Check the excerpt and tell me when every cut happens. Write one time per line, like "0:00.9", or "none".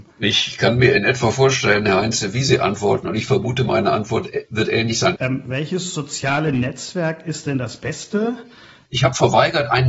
0:05.2
0:08.9